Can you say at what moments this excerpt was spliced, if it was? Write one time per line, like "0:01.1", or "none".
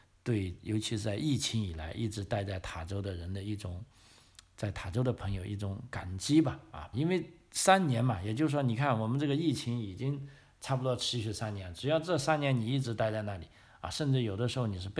0:06.9